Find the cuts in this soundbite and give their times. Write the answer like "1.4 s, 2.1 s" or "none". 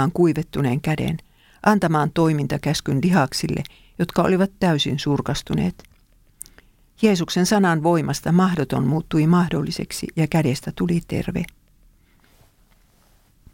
none